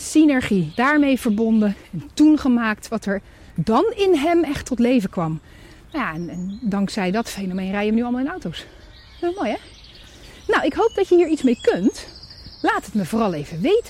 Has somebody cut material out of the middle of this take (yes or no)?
no